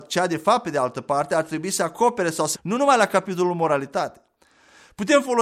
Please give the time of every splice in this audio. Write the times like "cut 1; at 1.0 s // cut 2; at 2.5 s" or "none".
cut 1; at 2.5 s